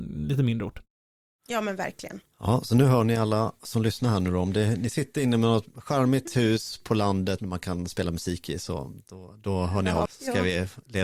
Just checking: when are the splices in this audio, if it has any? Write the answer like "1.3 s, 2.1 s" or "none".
7.4 s, 10.1 s